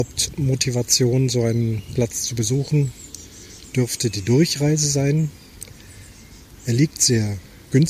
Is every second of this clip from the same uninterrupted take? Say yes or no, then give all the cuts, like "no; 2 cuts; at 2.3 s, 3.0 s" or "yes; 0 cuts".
yes; 0 cuts